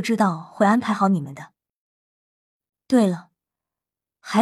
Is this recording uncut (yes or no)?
no